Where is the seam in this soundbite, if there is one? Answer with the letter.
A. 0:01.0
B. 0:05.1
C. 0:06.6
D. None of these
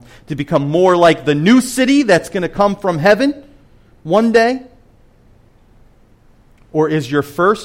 D